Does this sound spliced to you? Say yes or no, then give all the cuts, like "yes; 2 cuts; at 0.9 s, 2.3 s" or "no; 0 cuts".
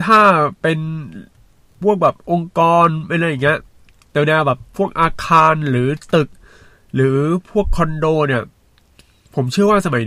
no; 0 cuts